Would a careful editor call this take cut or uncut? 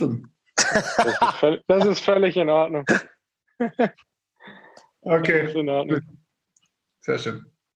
uncut